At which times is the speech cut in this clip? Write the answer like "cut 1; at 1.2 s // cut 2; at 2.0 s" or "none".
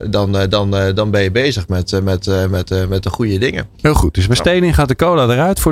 none